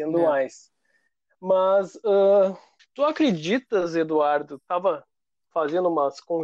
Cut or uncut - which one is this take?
cut